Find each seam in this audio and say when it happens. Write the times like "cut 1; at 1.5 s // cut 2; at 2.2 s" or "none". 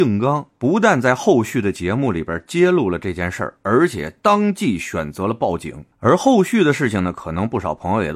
none